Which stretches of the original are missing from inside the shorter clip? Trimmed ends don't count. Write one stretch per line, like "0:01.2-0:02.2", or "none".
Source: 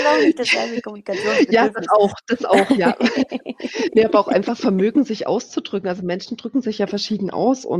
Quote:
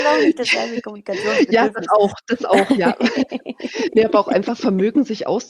none